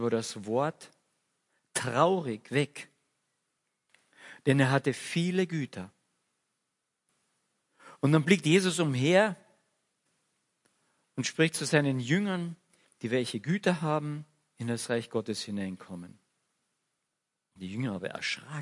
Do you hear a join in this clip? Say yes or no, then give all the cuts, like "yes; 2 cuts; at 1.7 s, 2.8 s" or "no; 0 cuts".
yes; 1 cut; at 12.8 s